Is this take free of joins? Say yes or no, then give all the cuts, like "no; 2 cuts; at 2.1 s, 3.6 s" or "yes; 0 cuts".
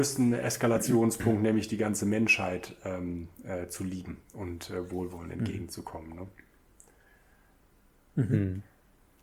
yes; 0 cuts